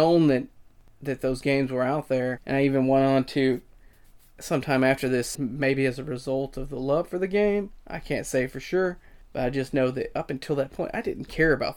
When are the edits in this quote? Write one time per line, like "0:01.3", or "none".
0:05.3